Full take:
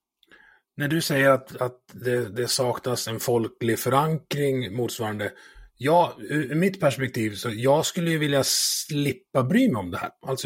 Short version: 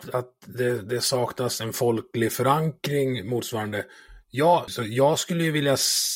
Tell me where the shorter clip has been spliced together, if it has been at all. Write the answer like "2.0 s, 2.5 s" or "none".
4.7 s